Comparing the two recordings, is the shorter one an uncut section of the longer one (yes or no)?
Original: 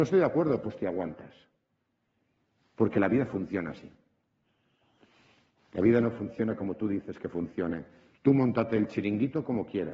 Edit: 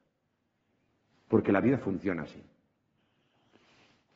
yes